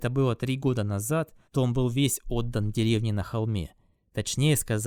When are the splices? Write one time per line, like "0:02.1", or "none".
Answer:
0:01.4